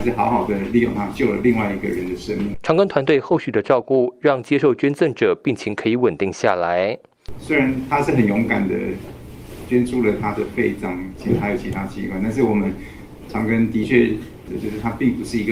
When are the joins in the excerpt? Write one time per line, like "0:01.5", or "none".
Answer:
0:02.5
0:07.4
0:14.5